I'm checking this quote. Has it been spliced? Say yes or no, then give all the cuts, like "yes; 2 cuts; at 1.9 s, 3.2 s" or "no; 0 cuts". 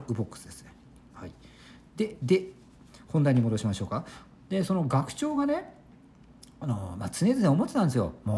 no; 0 cuts